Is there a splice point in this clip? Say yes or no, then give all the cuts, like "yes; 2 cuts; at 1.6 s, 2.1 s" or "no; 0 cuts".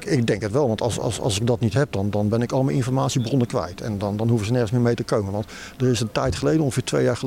no; 0 cuts